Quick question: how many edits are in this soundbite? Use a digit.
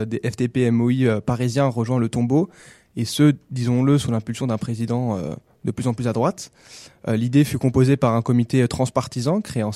0